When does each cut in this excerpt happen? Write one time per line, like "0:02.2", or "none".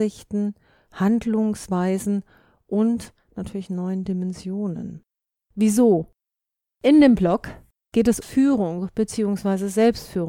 0:05.3
0:08.2

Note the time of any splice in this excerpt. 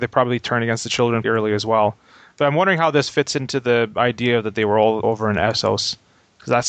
0:01.2
0:05.0

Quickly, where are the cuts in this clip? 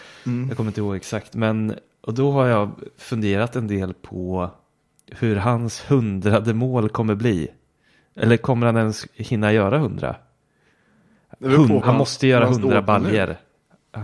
0:11.8

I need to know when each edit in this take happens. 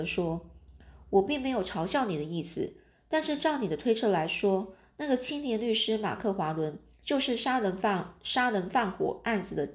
none

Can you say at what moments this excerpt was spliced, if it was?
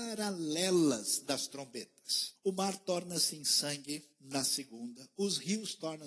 0:02.4
0:04.1

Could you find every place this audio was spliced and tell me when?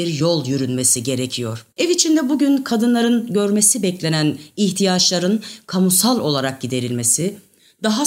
0:01.7

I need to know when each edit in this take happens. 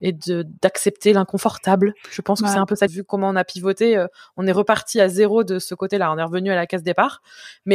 0:02.9

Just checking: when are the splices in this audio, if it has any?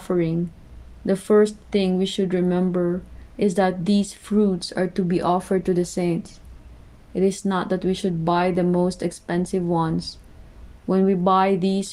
0:10.8

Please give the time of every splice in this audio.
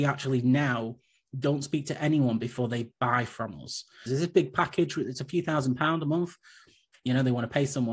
0:04.1
0:06.9

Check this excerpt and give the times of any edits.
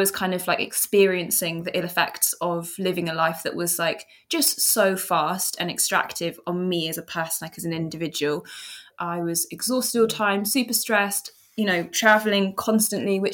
none

